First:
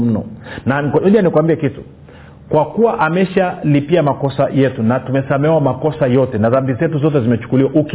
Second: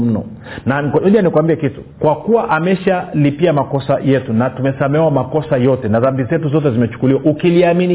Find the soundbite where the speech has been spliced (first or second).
second